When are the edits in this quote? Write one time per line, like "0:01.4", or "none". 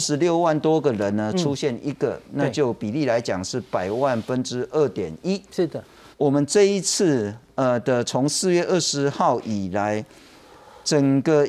0:06.1